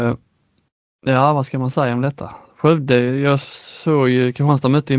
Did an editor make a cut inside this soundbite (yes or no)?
no